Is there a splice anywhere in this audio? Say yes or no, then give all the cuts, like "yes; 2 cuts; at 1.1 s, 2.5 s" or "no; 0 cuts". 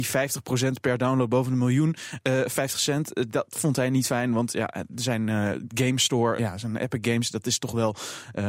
yes; 1 cut; at 6.4 s